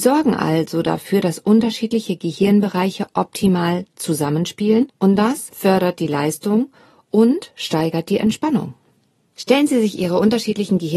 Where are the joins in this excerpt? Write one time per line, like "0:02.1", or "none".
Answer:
none